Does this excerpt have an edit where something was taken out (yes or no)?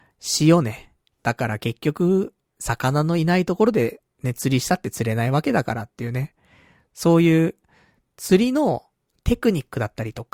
yes